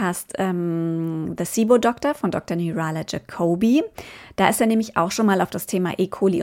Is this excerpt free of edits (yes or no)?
yes